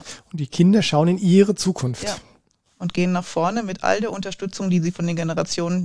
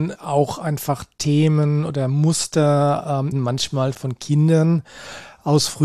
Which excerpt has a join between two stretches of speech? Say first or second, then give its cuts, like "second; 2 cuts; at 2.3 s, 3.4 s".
second; 1 cut; at 3.3 s